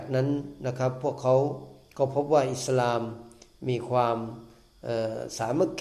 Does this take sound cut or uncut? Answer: uncut